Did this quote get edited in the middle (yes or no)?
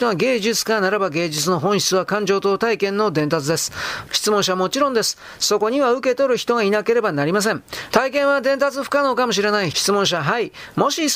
yes